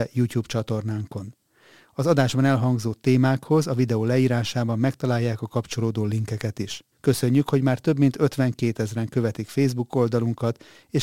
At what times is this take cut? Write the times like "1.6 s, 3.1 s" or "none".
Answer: 6.9 s